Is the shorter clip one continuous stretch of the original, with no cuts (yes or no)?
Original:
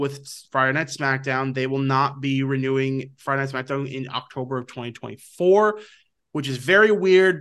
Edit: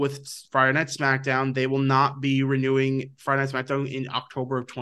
yes